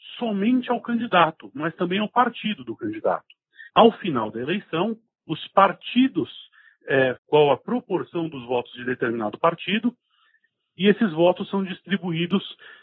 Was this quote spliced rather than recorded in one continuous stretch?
yes; 2 cuts; at 3.7 s, 7.2 s

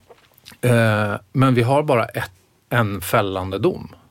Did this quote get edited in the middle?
no; 0 cuts

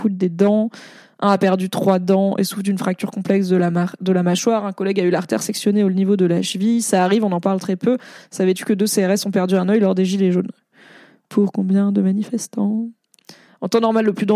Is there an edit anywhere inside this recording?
no; 0 cuts

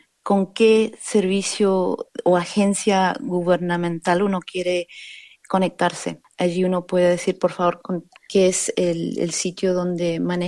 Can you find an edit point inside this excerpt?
yes; 1 cut; at 8.1 s

